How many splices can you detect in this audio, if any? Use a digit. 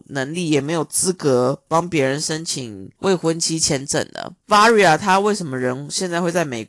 2